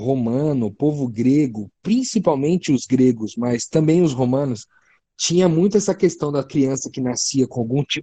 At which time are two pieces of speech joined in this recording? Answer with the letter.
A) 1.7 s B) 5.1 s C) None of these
C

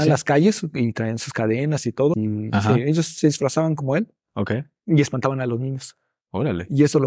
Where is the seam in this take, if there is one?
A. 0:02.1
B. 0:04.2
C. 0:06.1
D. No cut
A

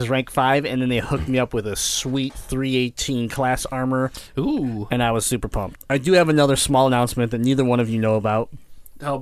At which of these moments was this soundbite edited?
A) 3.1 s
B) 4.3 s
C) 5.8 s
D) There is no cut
C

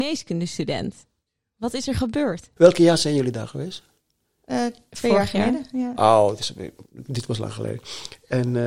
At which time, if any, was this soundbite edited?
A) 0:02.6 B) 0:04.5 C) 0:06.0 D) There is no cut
A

